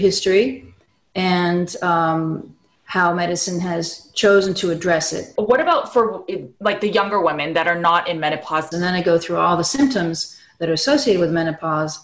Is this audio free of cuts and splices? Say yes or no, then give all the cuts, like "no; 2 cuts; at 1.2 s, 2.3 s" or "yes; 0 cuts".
no; 2 cuts; at 5.4 s, 8.7 s